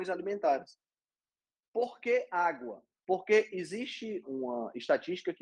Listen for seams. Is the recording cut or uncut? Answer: cut